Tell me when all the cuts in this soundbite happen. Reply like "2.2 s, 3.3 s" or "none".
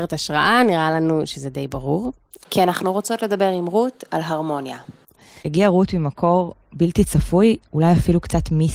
2.4 s, 5.4 s